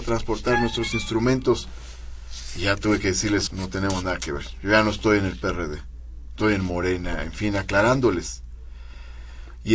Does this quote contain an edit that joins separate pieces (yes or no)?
yes